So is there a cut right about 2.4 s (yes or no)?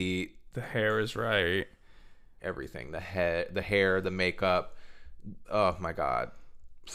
yes